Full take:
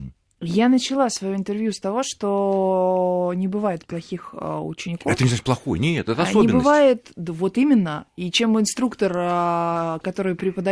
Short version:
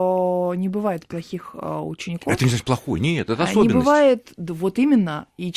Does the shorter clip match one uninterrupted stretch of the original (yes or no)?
yes